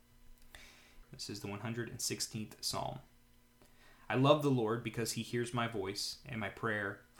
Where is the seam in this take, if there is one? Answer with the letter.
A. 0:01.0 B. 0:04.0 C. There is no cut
A